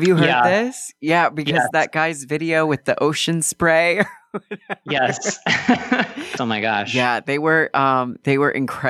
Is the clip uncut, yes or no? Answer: no